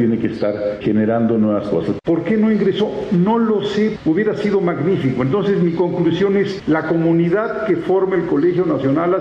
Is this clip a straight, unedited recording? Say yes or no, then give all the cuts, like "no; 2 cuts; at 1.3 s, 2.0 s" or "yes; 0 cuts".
no; 1 cut; at 2.0 s